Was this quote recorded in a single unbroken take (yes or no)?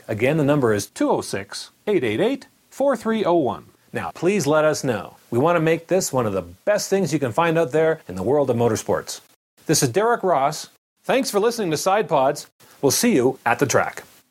no